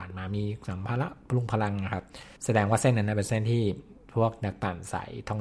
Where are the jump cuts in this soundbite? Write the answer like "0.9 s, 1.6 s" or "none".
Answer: 2.4 s